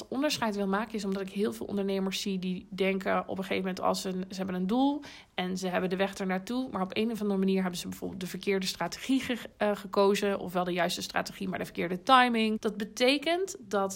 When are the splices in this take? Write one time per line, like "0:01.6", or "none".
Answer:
0:12.6